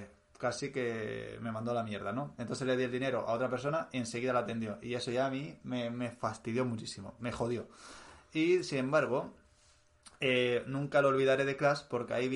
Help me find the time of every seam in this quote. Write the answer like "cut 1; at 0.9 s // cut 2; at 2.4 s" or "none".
none